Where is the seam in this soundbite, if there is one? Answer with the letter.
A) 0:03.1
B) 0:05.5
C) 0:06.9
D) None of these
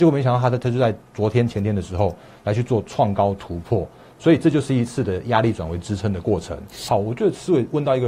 C